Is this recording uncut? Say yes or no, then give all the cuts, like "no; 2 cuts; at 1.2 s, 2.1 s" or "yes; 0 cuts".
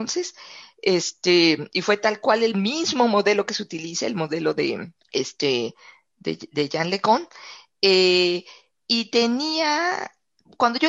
no; 1 cut; at 5.0 s